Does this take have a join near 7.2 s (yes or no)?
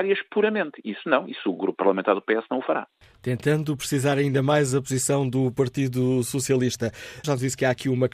yes